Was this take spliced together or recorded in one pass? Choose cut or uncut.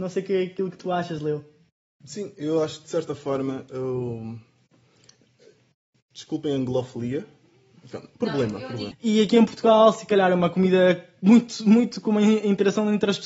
cut